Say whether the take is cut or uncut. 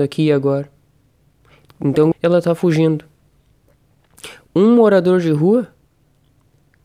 cut